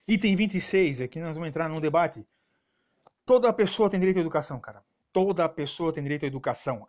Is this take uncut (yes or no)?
yes